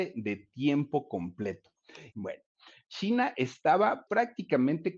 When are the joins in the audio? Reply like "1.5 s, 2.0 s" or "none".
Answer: 2.1 s, 4.1 s